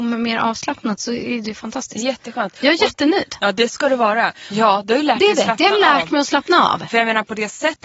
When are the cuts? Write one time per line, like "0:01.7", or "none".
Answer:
0:04.5